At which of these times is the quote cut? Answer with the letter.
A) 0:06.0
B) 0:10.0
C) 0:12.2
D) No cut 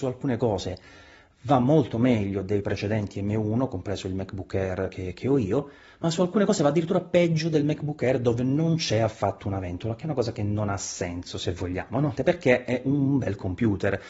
C